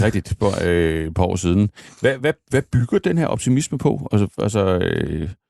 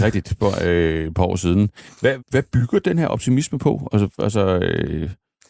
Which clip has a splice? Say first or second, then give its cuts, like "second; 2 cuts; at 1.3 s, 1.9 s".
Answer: second; 1 cut; at 2.2 s